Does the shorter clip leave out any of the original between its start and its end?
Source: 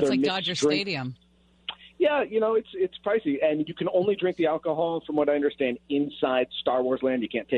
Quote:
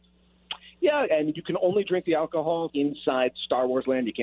yes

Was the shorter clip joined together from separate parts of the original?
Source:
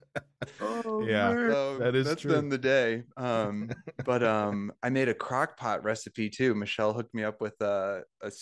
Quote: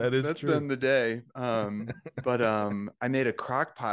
no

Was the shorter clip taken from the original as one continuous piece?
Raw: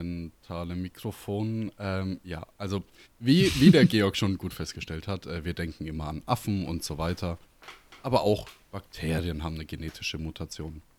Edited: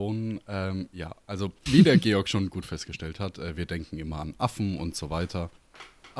no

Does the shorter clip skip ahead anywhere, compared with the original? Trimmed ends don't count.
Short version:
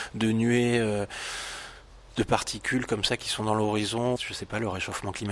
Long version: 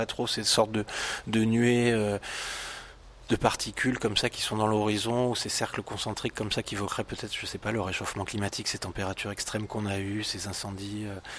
yes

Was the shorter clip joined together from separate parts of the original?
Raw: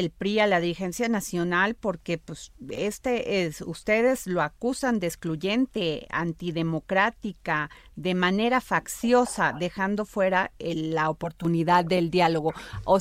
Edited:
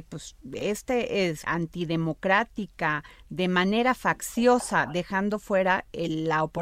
yes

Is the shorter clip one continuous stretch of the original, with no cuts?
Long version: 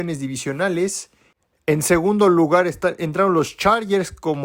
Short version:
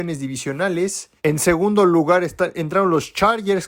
no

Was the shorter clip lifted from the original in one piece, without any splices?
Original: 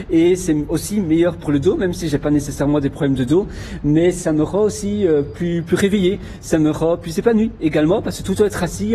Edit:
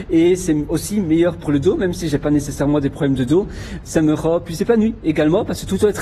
no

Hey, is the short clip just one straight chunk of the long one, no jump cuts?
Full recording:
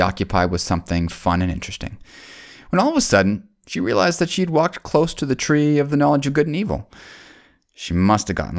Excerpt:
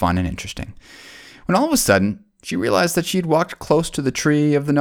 yes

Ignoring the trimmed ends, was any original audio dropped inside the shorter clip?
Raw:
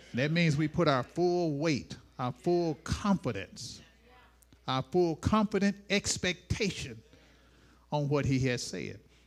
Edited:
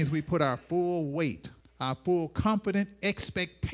yes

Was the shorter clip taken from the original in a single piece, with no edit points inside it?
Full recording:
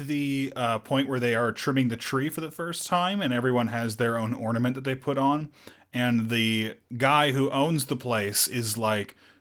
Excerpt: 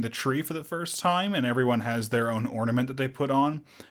yes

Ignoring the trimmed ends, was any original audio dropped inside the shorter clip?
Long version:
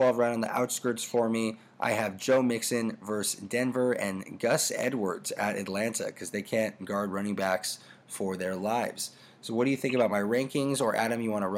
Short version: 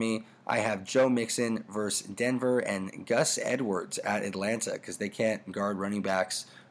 no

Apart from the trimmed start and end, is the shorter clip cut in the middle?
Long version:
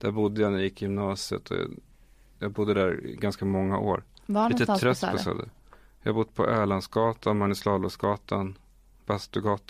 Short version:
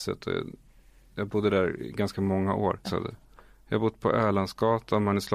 yes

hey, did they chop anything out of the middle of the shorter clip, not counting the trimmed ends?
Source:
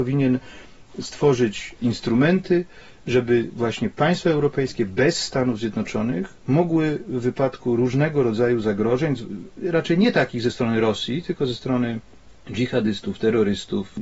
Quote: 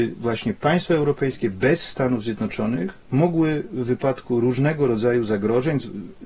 no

